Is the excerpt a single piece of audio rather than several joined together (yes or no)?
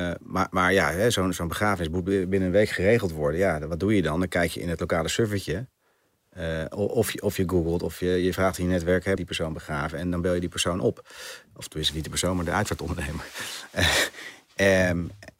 no